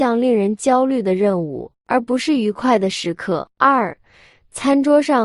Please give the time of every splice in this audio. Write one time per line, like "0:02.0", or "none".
0:03.5

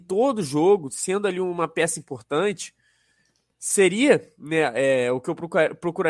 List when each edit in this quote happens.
none

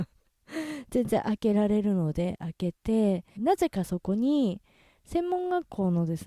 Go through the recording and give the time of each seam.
0:03.4

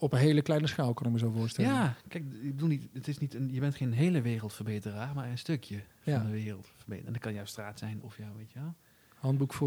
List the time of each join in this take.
0:08.0

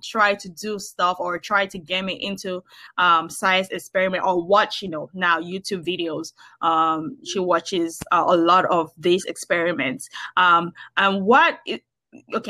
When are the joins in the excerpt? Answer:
none

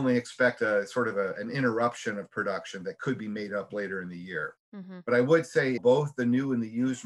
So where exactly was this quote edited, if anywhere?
0:04.6
0:05.8

